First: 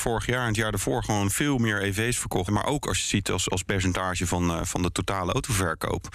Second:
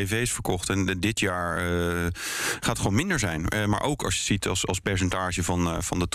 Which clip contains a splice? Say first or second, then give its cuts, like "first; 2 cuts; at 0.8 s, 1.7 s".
first; 1 cut; at 2.5 s